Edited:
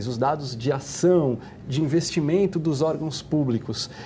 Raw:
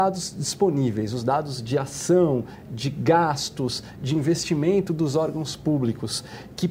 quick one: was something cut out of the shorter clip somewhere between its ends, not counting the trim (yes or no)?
yes